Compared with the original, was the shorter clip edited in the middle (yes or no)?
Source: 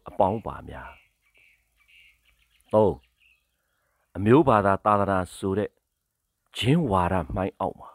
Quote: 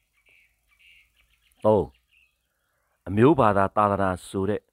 no